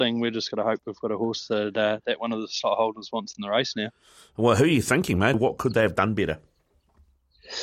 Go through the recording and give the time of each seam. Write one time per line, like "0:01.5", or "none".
0:05.3

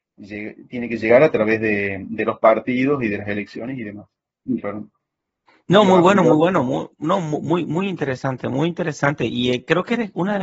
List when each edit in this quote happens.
0:04.4

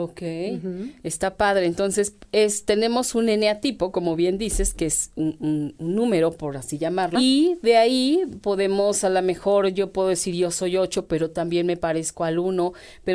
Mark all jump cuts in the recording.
0:07.1

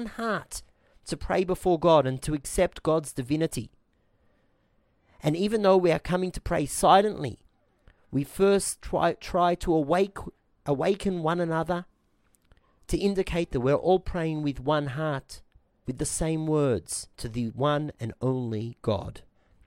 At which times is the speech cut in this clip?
0:15.8
0:17.1

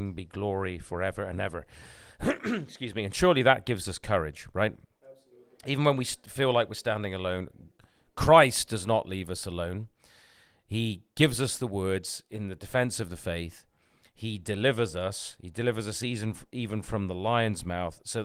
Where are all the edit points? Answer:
none

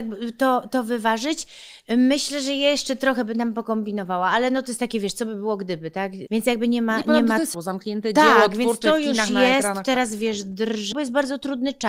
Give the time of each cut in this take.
0:06.3
0:07.5
0:10.9

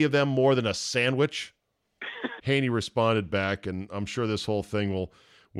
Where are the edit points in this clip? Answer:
0:02.4

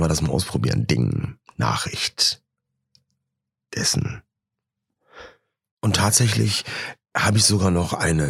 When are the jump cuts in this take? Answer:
none

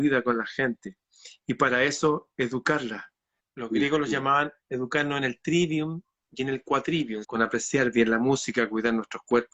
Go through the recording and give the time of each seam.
0:03.4
0:07.2

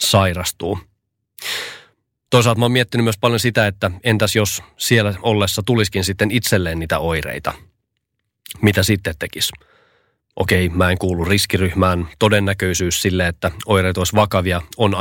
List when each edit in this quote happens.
none

